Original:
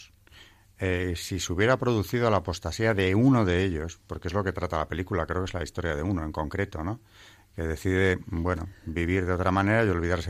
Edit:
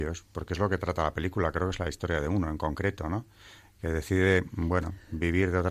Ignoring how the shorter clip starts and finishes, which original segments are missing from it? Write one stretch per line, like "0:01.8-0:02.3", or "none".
none